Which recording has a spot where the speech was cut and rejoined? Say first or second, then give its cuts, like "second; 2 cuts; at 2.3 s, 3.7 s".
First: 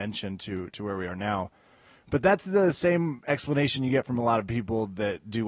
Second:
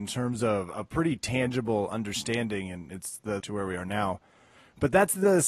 second; 1 cut; at 3.4 s